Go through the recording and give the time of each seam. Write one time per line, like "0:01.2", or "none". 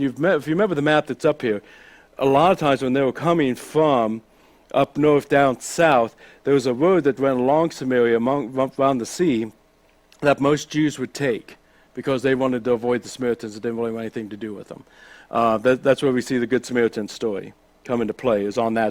none